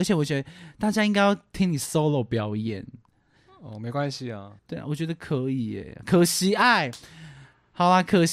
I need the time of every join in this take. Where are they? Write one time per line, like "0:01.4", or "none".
0:04.6